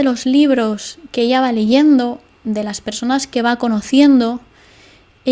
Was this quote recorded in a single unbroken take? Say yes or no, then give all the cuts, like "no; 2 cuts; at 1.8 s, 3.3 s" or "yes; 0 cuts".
yes; 0 cuts